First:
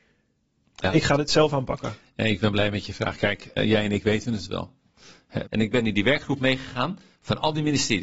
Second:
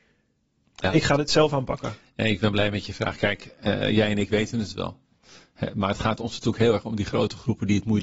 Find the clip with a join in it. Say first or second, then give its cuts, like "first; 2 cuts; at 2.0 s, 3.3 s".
first; 2 cuts; at 3.6 s, 5.5 s